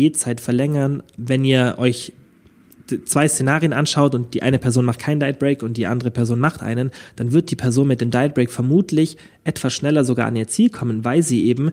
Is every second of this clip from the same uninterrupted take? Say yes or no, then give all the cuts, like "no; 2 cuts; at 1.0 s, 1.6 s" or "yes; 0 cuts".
no; 1 cut; at 1.2 s